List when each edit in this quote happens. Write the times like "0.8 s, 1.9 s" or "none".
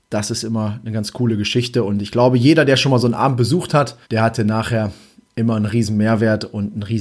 4.0 s

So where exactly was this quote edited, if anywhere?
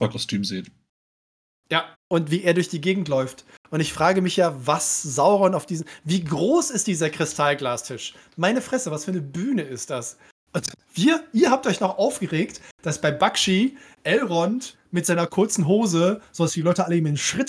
1.9 s

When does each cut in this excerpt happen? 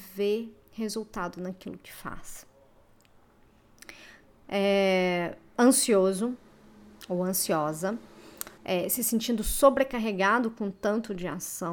4.4 s, 8.6 s

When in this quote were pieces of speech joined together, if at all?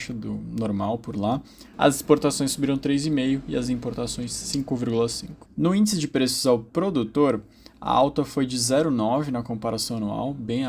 1.7 s, 5.5 s

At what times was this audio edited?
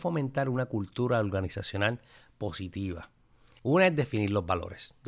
3.6 s

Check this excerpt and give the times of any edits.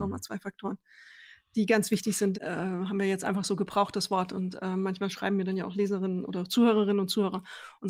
2.3 s

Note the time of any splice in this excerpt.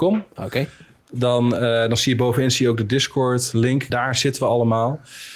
3.9 s

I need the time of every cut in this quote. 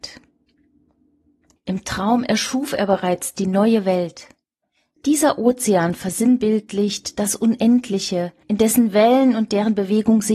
1.6 s, 5.0 s, 8.4 s

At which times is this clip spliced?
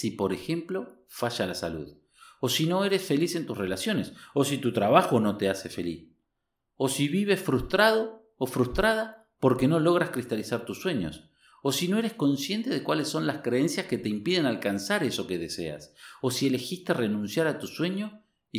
none

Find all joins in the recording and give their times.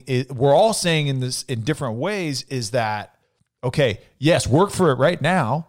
none

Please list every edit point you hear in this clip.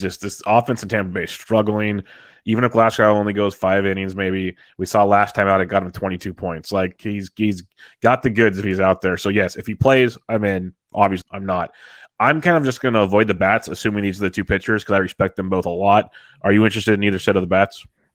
11.2 s

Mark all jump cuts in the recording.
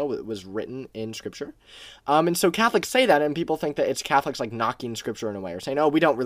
none

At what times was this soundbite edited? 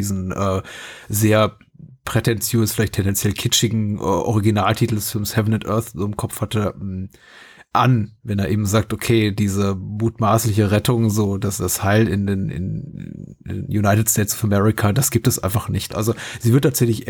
15.9 s

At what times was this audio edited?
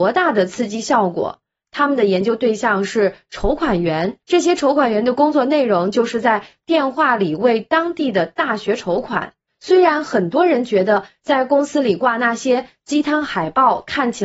4.2 s, 9.5 s

